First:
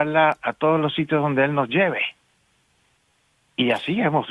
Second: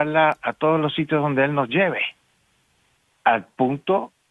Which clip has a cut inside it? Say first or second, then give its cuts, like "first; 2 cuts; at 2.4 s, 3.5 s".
second; 1 cut; at 3.1 s